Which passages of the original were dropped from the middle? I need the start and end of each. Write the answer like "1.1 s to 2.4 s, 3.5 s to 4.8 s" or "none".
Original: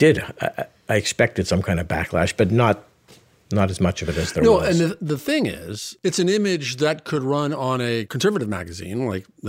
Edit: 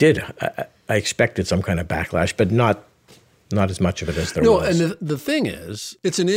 none